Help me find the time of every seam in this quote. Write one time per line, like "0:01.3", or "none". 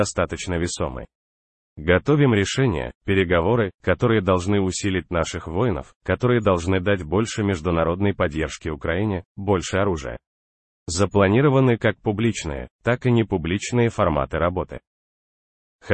none